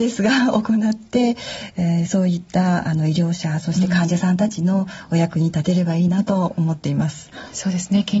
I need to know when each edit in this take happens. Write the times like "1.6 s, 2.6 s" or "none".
none